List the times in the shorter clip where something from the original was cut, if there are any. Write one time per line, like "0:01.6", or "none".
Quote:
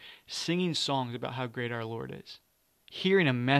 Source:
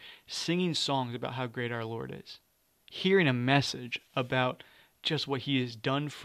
none